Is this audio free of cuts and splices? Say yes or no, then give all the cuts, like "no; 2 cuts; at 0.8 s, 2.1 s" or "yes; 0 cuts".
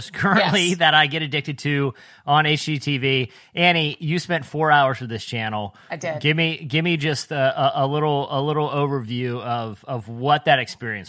yes; 0 cuts